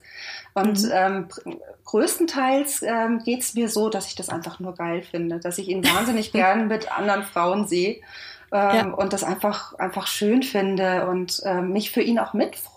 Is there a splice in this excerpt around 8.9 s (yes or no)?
no